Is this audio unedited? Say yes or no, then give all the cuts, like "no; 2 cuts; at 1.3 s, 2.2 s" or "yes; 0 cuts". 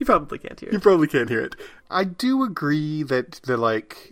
no; 1 cut; at 1.8 s